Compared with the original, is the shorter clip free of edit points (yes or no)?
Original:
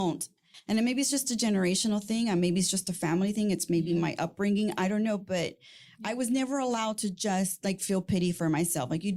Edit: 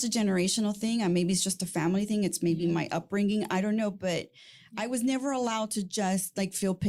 yes